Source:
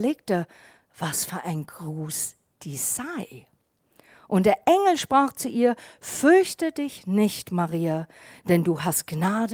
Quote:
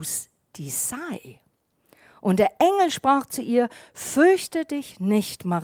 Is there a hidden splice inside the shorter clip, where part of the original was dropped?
no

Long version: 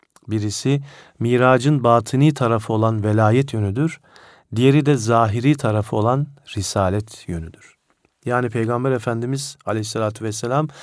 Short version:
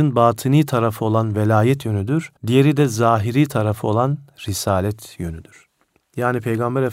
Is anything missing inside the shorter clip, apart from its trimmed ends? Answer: yes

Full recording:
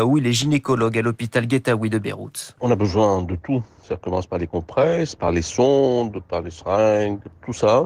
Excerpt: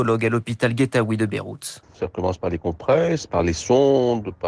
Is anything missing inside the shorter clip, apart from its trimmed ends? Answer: yes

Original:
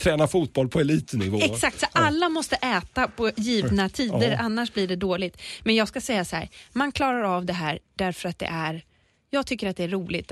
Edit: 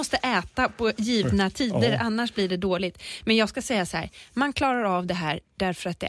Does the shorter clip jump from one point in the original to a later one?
no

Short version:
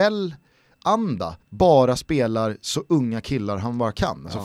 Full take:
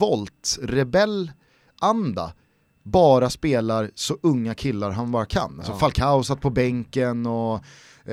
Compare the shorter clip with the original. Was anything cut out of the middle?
yes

